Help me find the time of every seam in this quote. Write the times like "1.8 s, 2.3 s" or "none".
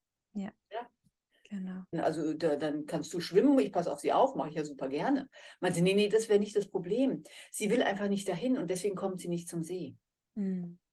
1.9 s